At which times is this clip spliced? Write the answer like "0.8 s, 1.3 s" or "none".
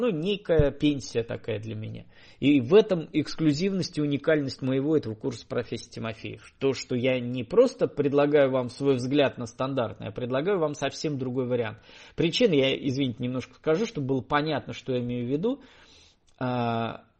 none